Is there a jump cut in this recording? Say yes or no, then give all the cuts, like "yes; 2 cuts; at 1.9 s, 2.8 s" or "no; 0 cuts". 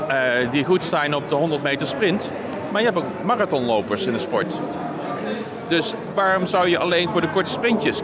no; 0 cuts